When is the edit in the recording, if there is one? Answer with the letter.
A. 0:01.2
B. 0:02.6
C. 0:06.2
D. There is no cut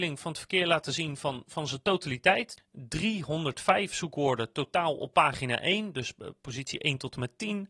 B